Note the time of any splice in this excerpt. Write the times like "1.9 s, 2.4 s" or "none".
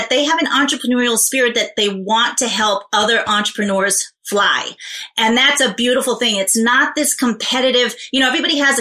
none